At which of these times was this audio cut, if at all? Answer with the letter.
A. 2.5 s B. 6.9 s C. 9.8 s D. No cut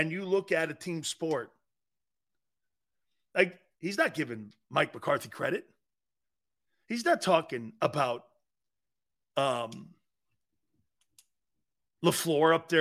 D